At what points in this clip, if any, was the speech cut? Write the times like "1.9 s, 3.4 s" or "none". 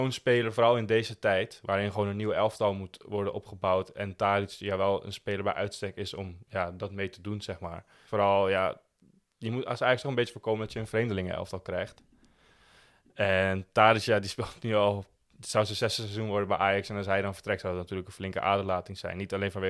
8.0 s